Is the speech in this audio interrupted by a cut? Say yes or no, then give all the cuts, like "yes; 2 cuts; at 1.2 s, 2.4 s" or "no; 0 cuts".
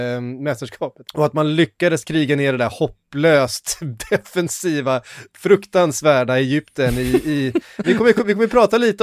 yes; 2 cuts; at 1.0 s, 7.8 s